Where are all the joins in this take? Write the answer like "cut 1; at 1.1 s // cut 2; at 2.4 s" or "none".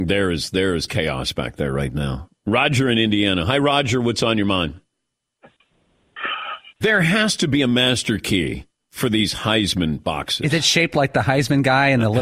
cut 1; at 6.8 s